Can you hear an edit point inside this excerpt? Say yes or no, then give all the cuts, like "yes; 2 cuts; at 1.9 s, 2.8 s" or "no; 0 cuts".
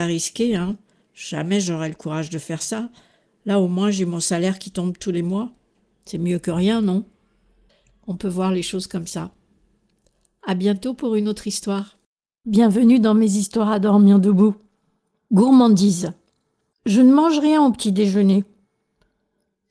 no; 0 cuts